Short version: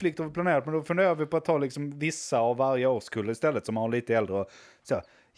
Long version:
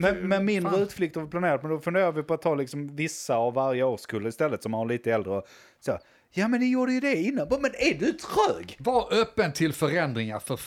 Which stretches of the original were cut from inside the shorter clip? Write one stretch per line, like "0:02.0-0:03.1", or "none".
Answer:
none